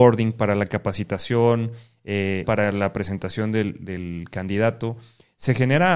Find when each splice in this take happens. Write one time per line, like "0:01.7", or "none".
0:02.4

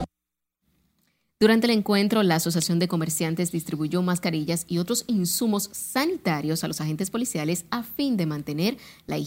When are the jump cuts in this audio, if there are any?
none

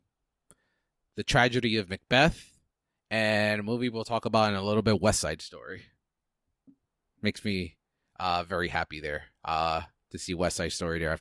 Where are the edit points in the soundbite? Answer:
none

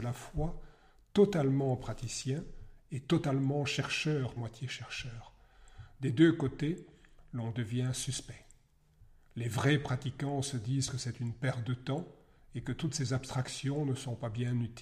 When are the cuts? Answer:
0:04.4

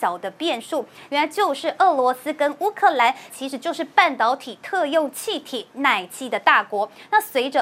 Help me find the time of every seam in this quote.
0:01.1
0:03.3

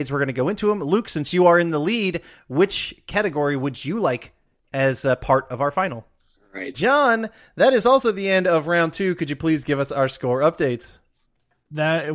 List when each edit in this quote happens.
0:06.7

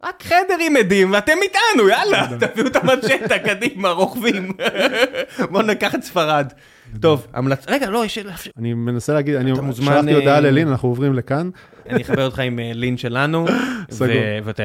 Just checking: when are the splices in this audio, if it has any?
0:08.5
0:11.9

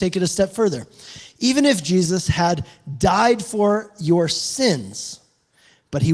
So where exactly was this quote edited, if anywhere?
none

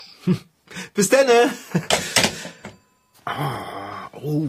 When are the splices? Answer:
none

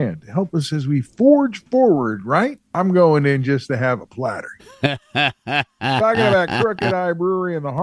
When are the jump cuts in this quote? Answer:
0:02.6
0:04.6

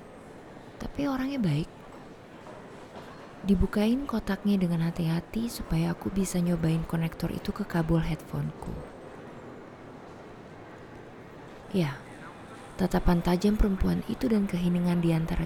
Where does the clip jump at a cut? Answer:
0:11.6

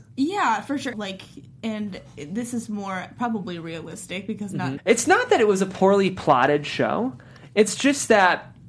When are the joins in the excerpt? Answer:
0:00.9
0:04.8

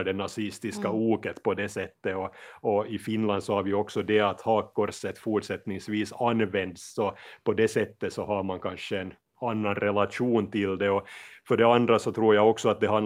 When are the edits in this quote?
none

